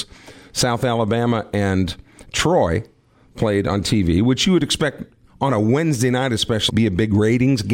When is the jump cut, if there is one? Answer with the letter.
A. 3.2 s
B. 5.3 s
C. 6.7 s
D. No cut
C